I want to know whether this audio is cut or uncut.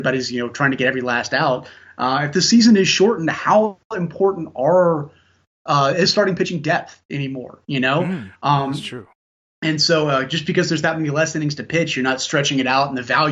uncut